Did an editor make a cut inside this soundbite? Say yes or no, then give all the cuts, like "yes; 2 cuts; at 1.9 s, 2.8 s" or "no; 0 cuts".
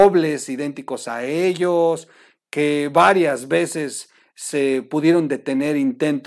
no; 0 cuts